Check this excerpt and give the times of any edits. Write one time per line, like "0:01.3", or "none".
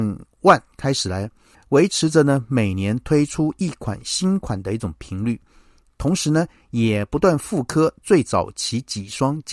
0:01.5